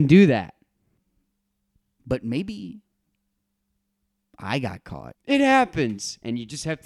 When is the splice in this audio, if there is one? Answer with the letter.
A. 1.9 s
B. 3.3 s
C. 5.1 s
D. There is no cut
C